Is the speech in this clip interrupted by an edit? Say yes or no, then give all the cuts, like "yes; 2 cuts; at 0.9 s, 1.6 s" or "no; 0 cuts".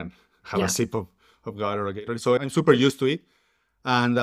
yes; 1 cut; at 2.4 s